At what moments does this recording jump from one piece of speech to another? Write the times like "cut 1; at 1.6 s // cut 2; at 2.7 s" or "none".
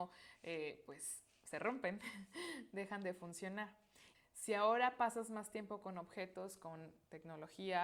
cut 1; at 4.1 s